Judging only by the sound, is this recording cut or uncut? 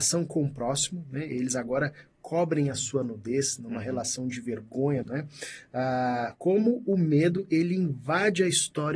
cut